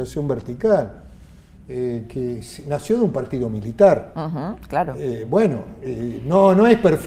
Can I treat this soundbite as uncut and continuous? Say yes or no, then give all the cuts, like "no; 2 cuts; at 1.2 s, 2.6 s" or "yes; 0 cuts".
yes; 0 cuts